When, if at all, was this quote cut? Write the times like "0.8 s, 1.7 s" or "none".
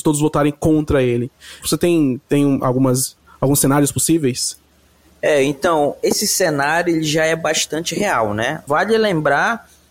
1.6 s, 8.7 s